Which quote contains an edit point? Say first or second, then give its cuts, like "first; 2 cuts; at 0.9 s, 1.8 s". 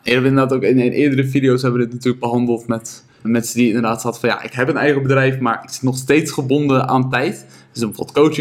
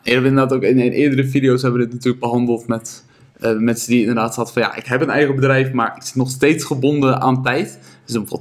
first; 1 cut; at 3.2 s